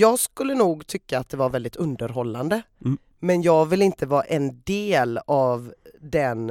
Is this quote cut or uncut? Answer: uncut